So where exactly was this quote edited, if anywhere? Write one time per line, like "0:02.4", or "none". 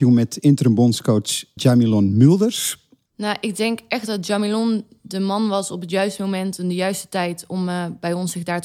0:01.6
0:03.1